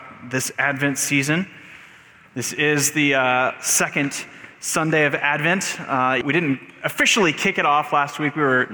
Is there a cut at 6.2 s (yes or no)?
yes